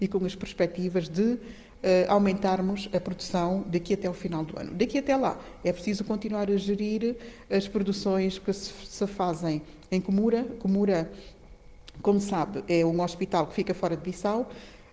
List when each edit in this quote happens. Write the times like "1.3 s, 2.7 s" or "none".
none

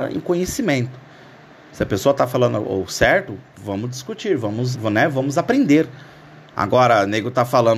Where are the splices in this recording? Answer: 4.7 s

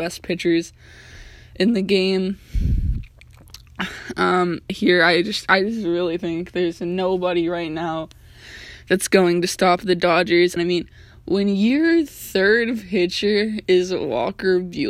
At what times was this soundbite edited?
4.7 s, 10.6 s

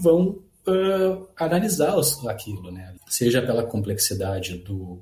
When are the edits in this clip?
3.0 s

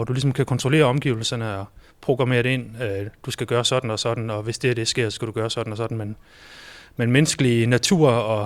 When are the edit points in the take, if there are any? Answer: none

